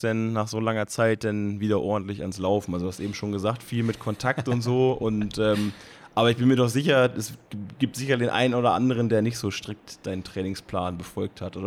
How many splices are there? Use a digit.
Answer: 0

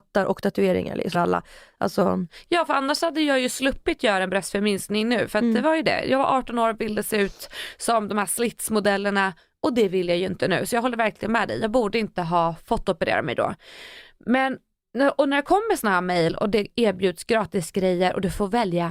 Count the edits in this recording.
1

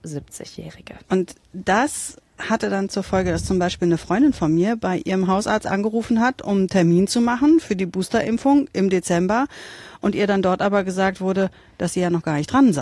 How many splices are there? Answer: 1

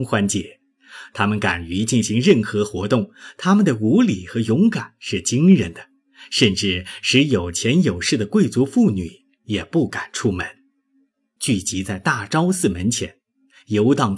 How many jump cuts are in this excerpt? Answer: 1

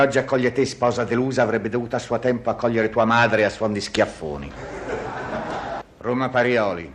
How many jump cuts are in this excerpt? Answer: 1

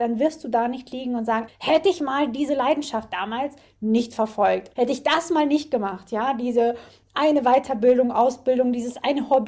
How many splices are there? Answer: 2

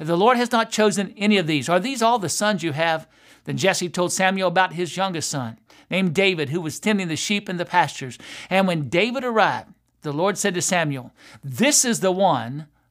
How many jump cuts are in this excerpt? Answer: 0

